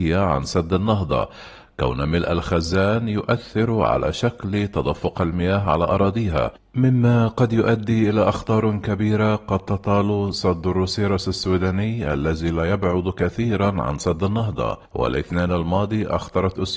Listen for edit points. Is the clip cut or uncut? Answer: cut